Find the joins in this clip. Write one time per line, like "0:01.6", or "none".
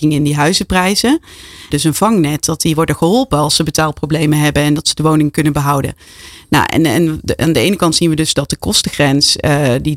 0:01.7